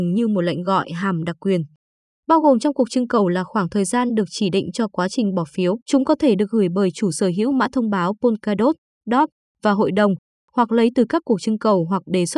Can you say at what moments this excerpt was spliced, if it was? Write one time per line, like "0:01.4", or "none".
0:05.8